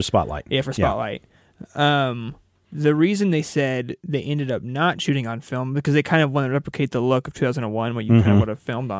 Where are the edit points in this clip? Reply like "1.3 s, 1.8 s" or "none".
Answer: none